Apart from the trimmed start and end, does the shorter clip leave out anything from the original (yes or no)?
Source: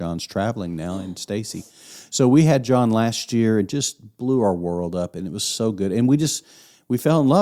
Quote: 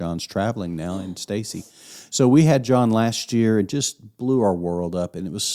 no